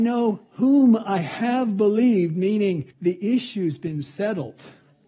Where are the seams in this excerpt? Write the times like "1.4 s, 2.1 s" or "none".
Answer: 2.9 s